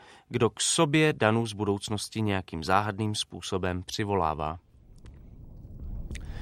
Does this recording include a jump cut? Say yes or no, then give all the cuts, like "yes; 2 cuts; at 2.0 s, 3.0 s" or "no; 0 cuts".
no; 0 cuts